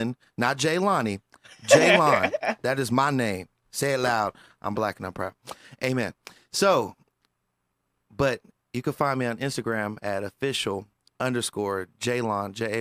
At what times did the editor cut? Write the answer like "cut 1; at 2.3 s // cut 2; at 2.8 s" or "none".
none